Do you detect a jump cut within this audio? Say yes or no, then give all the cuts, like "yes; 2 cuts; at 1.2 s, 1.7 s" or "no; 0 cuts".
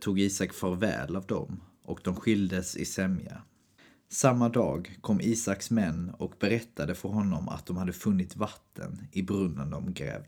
no; 0 cuts